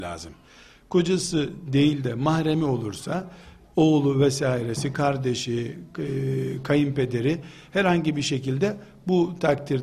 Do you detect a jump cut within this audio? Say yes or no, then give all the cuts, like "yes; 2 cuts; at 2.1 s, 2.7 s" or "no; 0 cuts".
no; 0 cuts